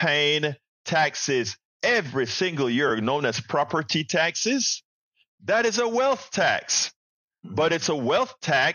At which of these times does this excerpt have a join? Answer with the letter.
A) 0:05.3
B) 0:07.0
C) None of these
A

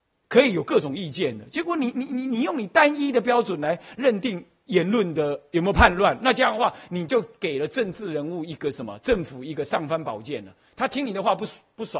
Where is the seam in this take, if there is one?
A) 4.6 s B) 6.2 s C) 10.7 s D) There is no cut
D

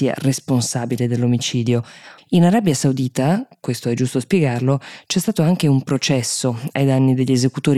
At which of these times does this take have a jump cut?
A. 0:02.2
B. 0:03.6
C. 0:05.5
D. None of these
A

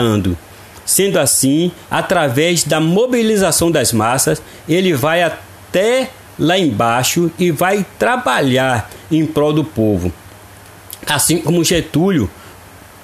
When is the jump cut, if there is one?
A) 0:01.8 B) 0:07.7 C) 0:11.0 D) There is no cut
A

